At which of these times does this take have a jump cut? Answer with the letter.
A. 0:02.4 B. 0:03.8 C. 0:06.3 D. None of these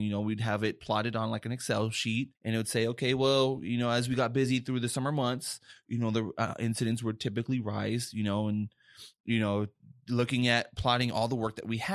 A